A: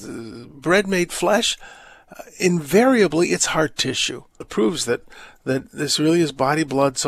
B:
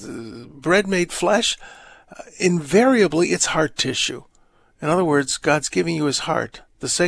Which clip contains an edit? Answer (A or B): A